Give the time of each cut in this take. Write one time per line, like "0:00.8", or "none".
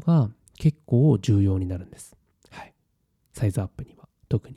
none